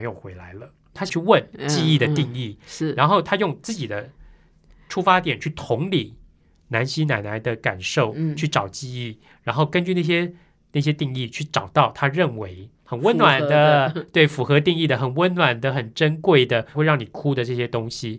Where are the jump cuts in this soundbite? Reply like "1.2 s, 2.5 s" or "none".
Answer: 0.9 s, 16.7 s

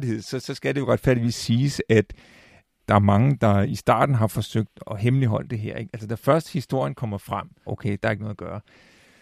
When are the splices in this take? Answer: 4.8 s, 7.7 s

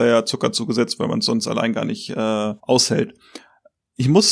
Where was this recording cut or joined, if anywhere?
2.6 s

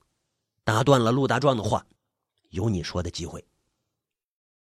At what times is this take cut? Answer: 1.9 s

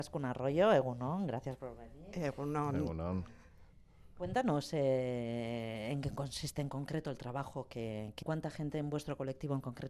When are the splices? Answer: 8.2 s

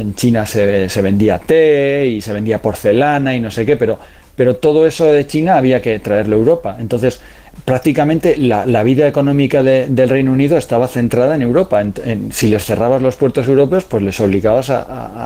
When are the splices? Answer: none

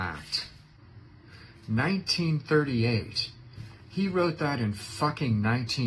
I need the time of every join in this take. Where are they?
none

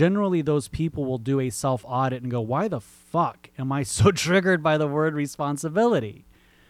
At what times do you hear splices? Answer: none

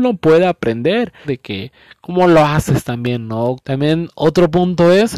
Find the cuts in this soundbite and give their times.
1.2 s, 3.6 s

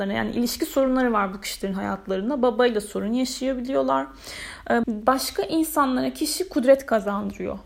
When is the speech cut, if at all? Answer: 4.8 s

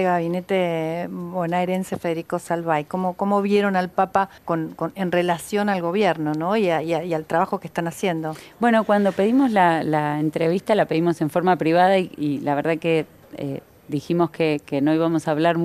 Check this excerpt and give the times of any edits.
4.4 s

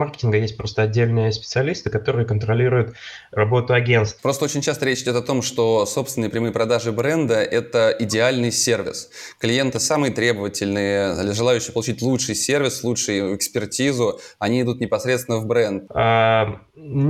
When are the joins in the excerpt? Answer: 4.2 s, 15.9 s

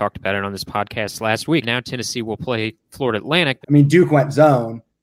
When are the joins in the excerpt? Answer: 1.6 s, 3.6 s

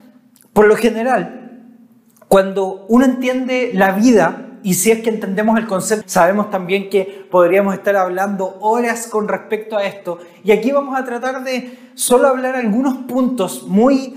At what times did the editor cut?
6.0 s

